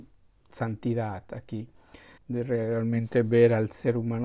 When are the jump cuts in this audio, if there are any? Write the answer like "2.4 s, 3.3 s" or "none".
2.2 s